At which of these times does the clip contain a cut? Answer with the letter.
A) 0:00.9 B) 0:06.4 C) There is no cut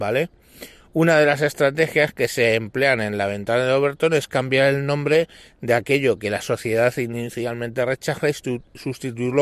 C